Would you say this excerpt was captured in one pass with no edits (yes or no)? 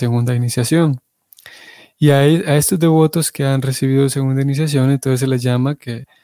yes